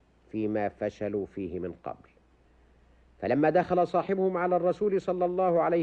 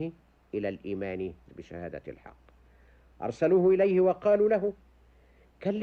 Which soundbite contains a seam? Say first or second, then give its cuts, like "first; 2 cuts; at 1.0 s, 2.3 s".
second; 1 cut; at 1.5 s